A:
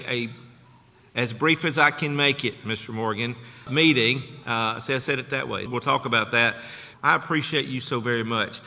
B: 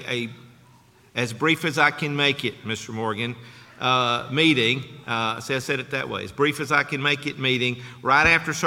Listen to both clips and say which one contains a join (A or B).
A